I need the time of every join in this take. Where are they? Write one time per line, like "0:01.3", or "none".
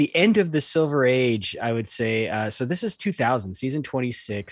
none